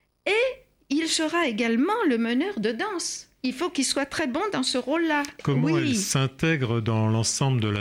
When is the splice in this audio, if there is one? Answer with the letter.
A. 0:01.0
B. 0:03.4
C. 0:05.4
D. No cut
C